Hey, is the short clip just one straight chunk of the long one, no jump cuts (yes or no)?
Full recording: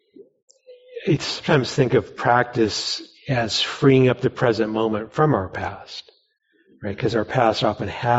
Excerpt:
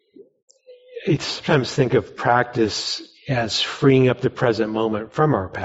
yes